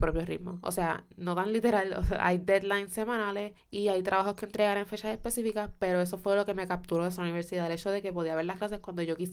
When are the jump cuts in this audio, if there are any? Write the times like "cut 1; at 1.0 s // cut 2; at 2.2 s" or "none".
none